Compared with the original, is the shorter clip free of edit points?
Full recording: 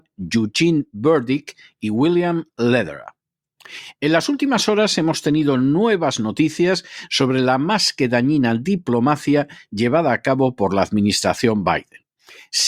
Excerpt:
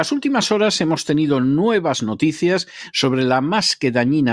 yes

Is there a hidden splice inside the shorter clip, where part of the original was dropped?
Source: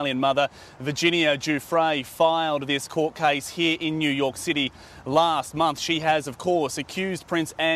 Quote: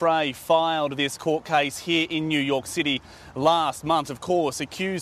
yes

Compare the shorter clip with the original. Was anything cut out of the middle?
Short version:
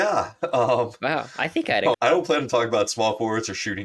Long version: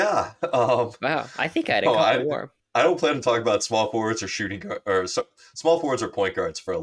yes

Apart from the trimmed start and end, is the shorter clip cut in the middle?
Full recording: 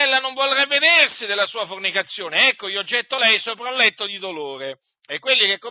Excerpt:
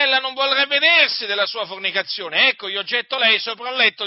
no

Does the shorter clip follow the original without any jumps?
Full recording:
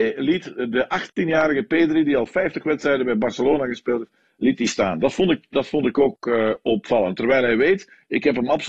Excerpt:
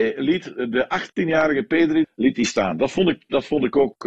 no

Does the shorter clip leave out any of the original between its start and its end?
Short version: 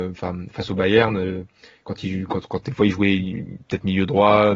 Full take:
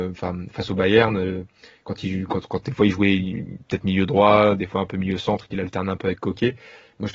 no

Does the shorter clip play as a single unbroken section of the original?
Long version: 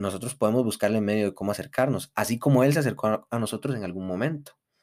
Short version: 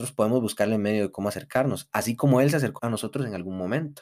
no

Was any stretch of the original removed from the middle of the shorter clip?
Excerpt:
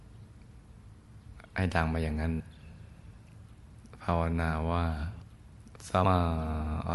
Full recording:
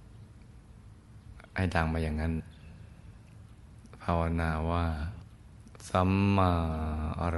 yes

